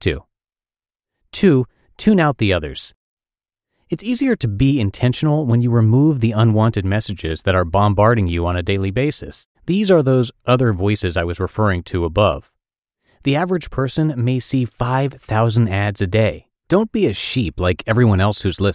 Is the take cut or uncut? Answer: cut